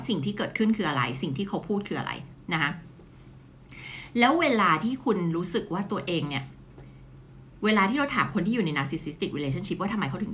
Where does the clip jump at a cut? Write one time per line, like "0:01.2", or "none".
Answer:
none